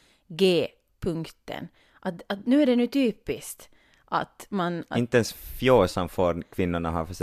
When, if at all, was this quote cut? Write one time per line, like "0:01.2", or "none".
none